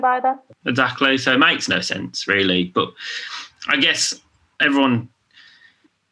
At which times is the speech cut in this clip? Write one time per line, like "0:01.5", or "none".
none